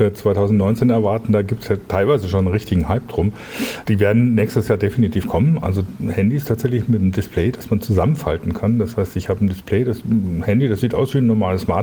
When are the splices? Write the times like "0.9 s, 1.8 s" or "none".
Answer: 3.8 s